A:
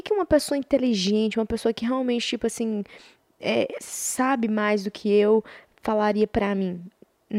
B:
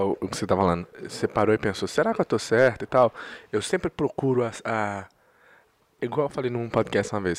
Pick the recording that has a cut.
B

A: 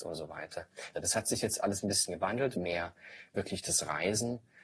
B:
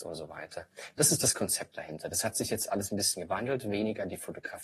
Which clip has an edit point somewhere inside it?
A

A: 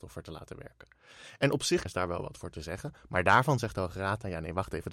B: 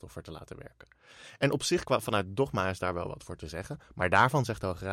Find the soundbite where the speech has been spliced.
A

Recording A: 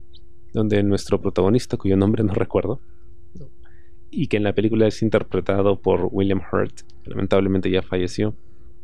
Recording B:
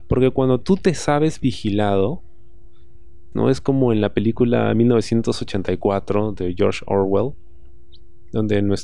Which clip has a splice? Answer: B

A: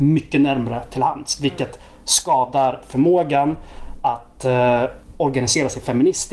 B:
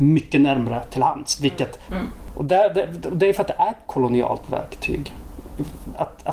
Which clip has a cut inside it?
B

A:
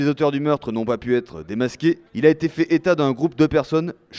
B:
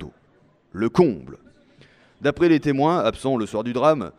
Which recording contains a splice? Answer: A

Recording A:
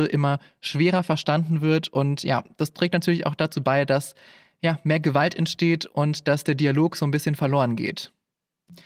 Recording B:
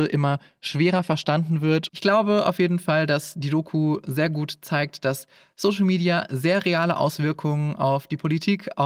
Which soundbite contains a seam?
B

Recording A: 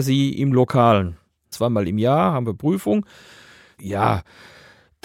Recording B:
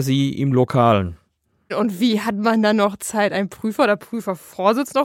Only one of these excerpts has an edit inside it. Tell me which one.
A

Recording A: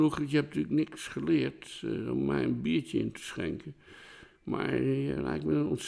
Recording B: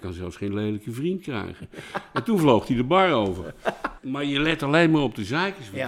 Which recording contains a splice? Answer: B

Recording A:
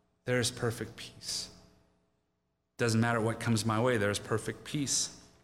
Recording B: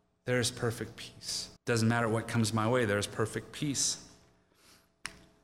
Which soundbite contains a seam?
B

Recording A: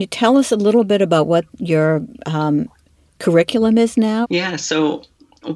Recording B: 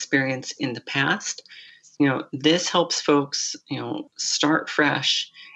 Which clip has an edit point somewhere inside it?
A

